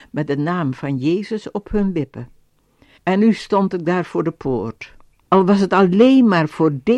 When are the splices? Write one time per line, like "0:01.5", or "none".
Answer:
0:03.0
0:05.3